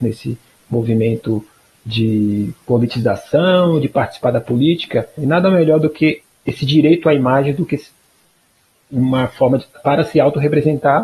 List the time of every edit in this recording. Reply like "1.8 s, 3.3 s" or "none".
5.2 s, 9.7 s